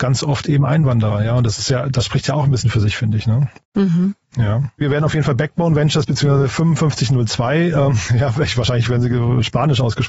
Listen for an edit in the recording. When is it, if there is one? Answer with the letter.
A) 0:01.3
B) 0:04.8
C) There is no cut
B